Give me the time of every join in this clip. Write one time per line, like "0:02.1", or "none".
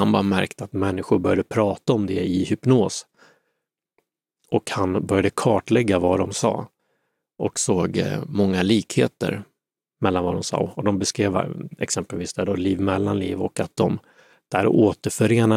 none

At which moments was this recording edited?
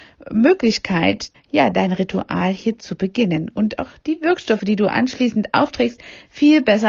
0:01.3

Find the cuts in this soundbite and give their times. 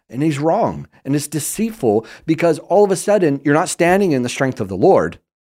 none

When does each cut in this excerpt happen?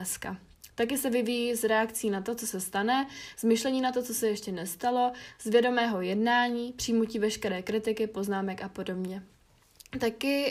none

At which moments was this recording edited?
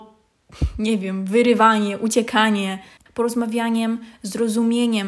0:03.1

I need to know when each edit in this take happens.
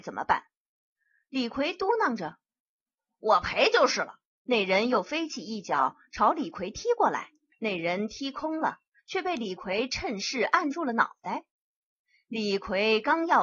0:04.3
0:07.5

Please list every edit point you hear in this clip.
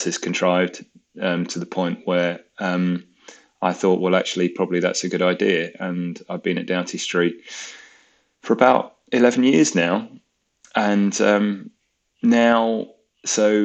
none

